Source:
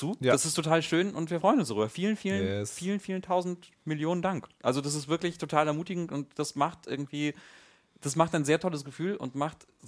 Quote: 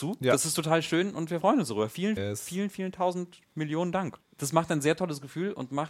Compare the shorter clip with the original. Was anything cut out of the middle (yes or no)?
yes